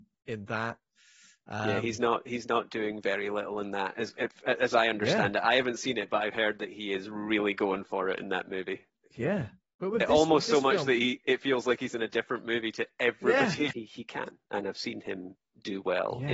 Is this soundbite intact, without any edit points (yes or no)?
no